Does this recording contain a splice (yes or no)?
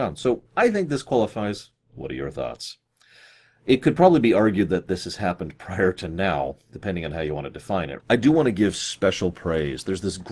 yes